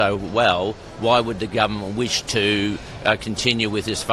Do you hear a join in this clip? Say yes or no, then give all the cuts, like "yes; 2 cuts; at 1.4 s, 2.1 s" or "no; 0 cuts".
no; 0 cuts